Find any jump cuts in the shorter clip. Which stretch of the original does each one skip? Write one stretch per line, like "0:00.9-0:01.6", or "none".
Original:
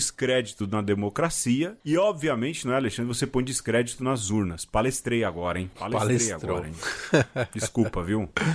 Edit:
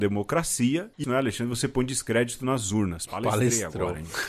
0:01.9-0:02.6
0:04.6-0:05.7